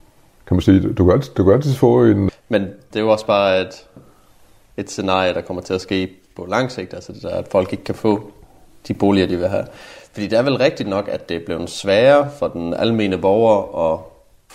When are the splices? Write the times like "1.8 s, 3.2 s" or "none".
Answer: 2.3 s